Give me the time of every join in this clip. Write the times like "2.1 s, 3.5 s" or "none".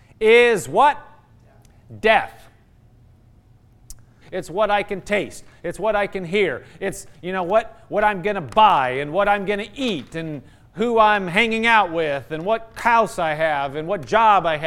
4.2 s